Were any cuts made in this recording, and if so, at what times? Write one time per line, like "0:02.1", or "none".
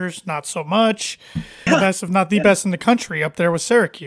0:01.7